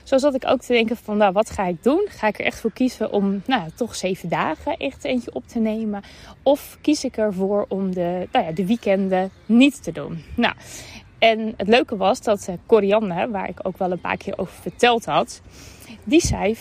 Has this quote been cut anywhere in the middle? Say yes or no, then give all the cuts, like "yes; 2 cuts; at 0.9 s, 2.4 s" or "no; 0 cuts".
no; 0 cuts